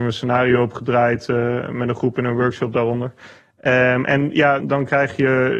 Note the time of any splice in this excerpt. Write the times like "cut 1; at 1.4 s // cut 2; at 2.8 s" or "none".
cut 1; at 4.6 s

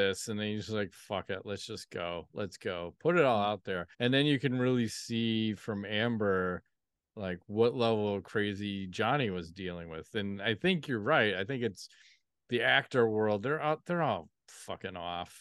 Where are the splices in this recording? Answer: cut 1; at 3.9 s

